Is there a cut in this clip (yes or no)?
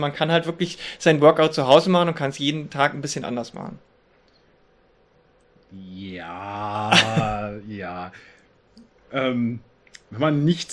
no